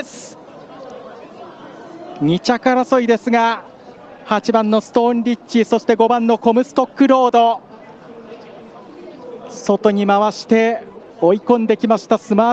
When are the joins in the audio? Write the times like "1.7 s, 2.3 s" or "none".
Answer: 11.1 s